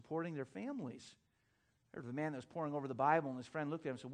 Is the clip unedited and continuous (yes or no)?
yes